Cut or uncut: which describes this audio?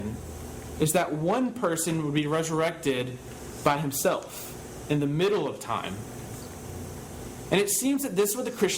uncut